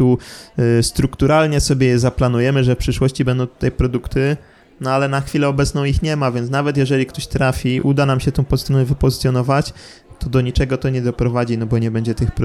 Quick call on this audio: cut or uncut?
uncut